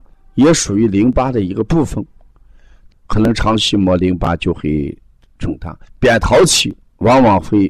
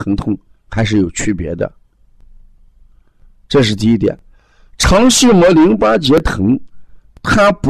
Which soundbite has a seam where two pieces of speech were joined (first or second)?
first